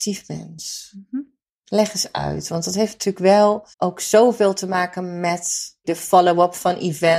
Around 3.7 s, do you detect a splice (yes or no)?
yes